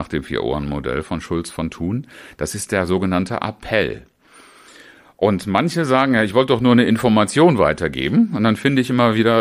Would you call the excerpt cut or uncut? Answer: uncut